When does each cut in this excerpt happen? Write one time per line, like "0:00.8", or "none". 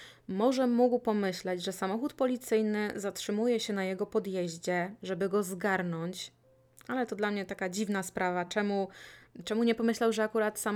none